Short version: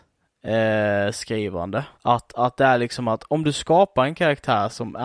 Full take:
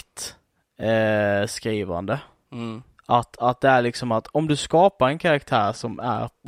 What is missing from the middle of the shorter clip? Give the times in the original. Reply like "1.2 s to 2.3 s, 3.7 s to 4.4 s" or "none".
2.3 s to 3.0 s